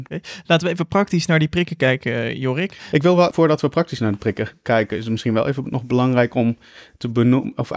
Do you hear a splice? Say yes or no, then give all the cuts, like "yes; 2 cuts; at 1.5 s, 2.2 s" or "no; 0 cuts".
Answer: yes; 1 cut; at 3.3 s